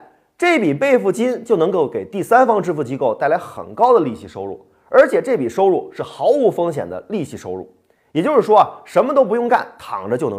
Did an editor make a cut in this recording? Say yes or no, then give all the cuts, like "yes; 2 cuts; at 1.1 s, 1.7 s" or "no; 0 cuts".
no; 0 cuts